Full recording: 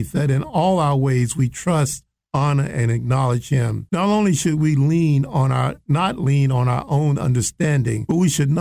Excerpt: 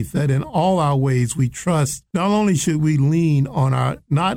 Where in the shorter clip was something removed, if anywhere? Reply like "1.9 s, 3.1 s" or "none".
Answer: 2.1 s